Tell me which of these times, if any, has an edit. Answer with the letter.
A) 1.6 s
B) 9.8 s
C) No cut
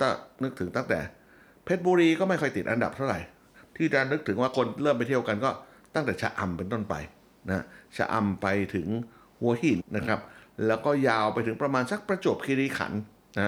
B